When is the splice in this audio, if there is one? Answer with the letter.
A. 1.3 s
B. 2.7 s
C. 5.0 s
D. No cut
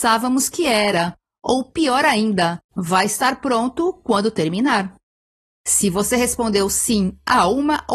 B